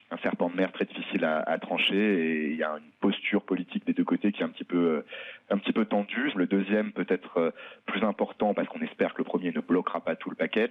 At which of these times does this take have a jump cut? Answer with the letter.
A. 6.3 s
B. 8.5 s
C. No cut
A